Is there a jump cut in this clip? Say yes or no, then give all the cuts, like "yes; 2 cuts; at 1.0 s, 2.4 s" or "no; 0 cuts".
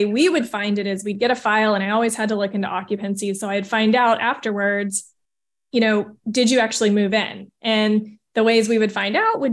no; 0 cuts